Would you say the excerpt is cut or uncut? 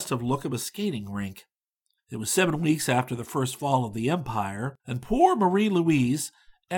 cut